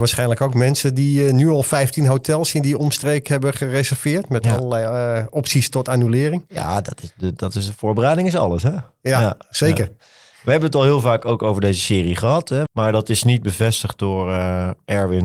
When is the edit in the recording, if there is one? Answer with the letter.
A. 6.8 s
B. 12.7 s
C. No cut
B